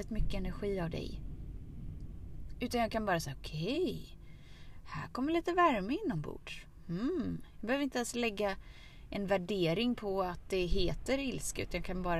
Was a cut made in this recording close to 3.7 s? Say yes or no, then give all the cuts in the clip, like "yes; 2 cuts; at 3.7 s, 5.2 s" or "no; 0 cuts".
no; 0 cuts